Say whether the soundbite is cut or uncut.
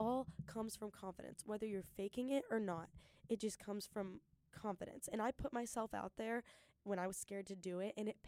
uncut